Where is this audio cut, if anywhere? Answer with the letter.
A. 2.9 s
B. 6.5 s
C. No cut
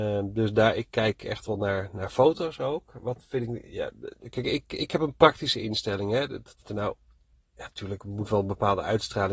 B